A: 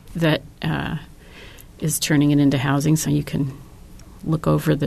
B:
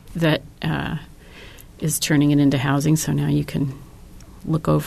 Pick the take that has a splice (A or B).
A